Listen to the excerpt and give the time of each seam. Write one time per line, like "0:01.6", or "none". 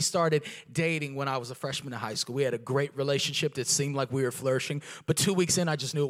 none

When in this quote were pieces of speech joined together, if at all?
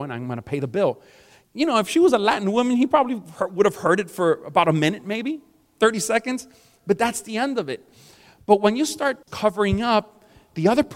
none

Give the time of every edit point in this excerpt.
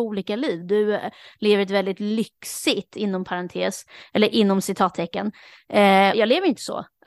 0:06.1

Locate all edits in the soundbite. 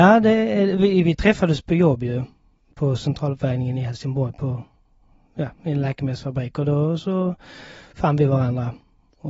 none

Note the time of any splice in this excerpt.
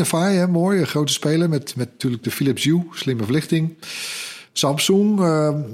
none

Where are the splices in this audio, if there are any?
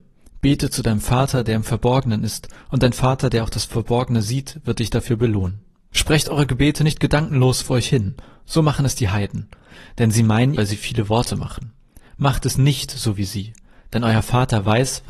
0:10.5

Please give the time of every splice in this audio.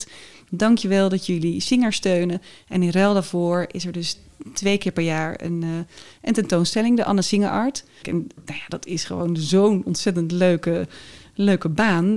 0:08.0

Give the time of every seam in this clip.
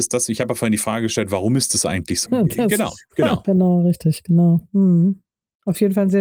0:02.3
0:03.4

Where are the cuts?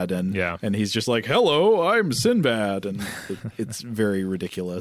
none

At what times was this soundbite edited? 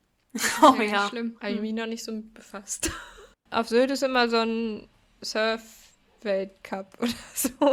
0:01.4
0:03.3

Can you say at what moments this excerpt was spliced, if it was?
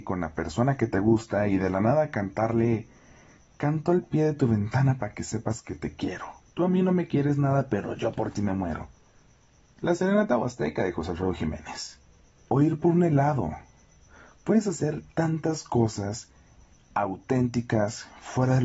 0:12.4

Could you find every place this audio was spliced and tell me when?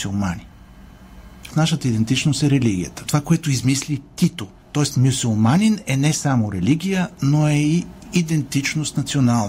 0:01.5
0:03.0

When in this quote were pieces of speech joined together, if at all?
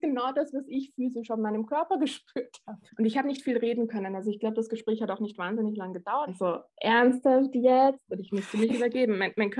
0:02.9
0:06.3

